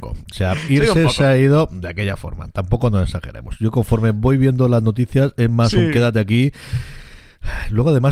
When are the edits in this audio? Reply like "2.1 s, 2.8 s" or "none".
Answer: none